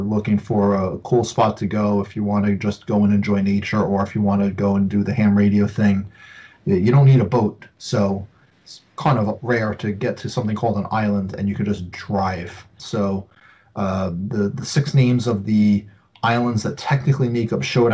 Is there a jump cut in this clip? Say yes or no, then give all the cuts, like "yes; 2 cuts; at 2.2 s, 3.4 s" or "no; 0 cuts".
yes; 1 cut; at 12.8 s